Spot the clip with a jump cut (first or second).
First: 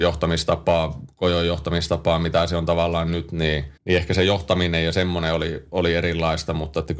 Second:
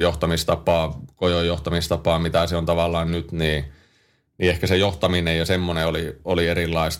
first